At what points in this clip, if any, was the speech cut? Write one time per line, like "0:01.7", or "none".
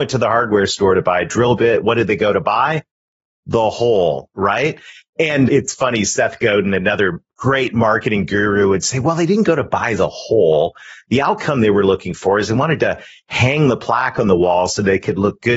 0:05.5